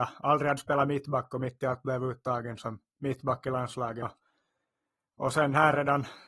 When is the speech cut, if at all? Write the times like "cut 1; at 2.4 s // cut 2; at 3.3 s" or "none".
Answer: cut 1; at 4.0 s